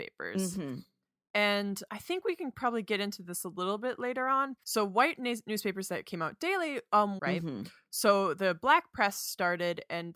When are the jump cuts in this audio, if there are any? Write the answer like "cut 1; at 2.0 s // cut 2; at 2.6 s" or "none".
cut 1; at 4.6 s // cut 2; at 7.2 s

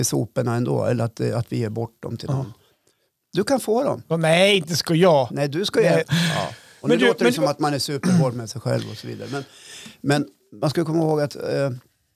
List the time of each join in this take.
cut 1; at 6.0 s

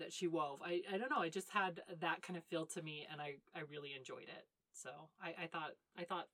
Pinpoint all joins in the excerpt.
none

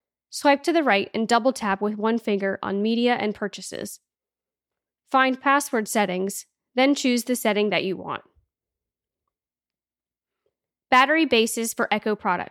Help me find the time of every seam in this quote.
none

